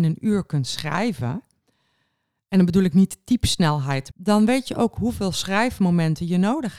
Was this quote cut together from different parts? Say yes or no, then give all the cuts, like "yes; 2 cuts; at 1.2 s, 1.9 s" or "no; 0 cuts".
yes; 1 cut; at 4.1 s